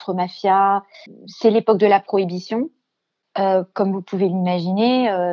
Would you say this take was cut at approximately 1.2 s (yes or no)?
no